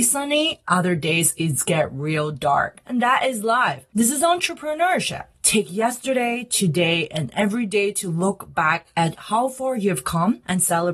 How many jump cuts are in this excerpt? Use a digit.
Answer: 1